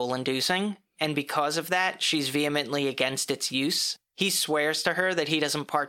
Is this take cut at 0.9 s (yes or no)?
yes